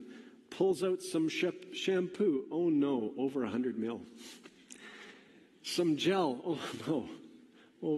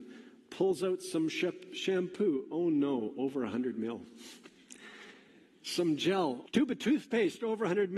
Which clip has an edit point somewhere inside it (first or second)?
second